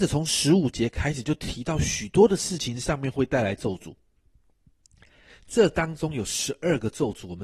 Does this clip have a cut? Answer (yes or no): no